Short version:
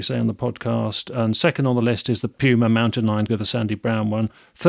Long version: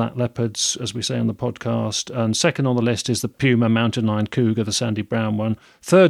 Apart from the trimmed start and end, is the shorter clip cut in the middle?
yes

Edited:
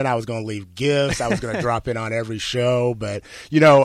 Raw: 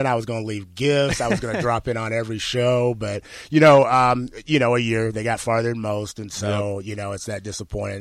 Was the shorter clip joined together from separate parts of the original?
no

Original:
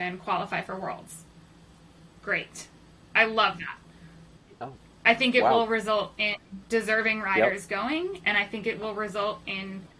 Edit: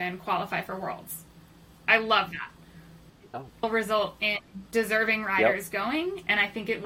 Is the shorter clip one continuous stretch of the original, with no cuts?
no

